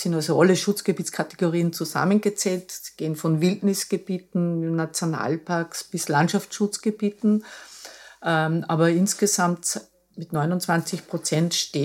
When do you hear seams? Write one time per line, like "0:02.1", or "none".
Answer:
none